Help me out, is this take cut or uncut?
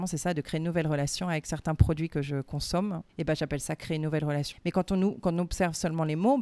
cut